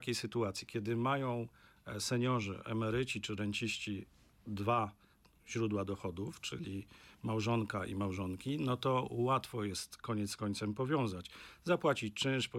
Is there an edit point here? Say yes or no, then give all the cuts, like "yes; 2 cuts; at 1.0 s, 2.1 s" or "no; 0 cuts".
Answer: no; 0 cuts